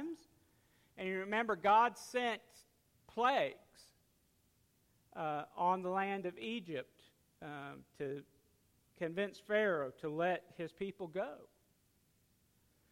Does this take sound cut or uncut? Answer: uncut